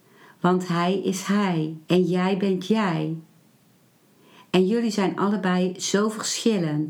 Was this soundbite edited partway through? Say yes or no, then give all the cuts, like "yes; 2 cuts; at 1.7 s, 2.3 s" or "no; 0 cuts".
yes; 1 cut; at 1.8 s